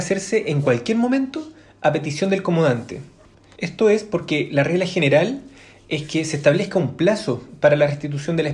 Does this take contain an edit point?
yes; 1 cut; at 3.6 s

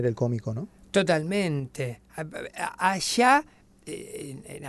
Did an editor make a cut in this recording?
no; 0 cuts

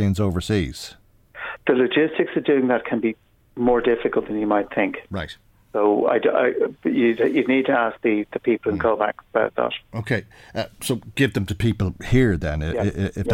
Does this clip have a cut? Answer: no; 0 cuts

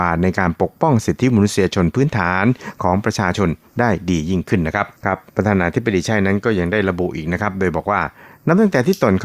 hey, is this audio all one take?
no; 1 cut; at 5.0 s

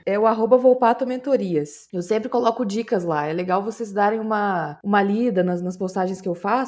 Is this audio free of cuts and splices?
yes; 0 cuts

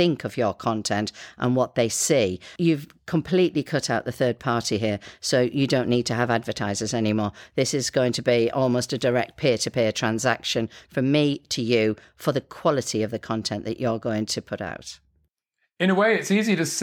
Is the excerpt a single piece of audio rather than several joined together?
yes; 0 cuts

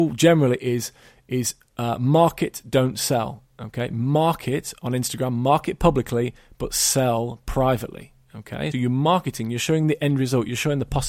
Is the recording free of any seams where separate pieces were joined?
no; 1 cut; at 8.7 s

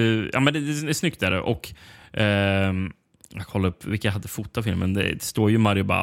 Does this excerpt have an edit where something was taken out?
no; 0 cuts

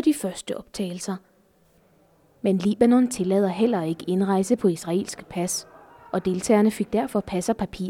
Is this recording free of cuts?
yes; 0 cuts

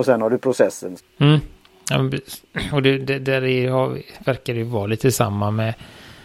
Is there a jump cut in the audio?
yes; 1 cut; at 1.0 s

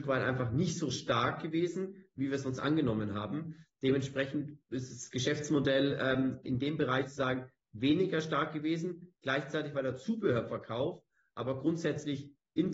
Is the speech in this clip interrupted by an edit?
no; 0 cuts

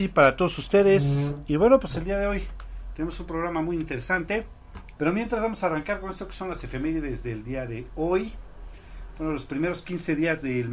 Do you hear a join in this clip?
yes; 1 cut; at 5.0 s

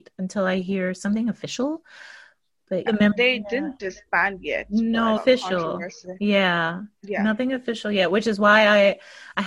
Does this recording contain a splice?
yes; 2 cuts; at 2.9 s, 5.2 s

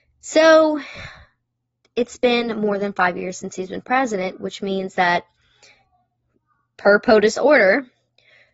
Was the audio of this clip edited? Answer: no; 0 cuts

